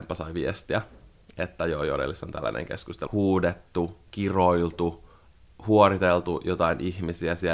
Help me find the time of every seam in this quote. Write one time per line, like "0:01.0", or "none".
0:03.1